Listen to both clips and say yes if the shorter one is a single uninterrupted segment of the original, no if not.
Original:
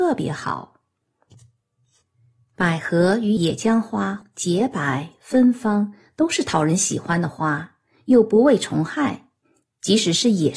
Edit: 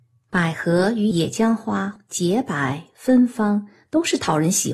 yes